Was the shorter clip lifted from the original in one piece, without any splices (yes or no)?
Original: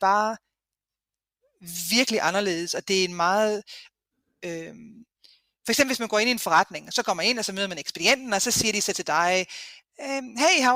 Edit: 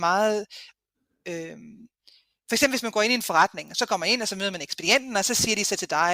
yes